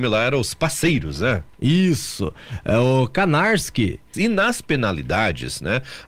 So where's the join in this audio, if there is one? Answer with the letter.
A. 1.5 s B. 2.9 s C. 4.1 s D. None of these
C